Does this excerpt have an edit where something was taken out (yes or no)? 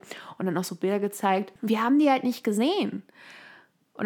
yes